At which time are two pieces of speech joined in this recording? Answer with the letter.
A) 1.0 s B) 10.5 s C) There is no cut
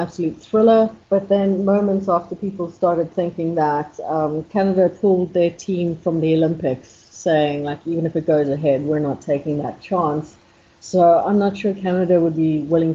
A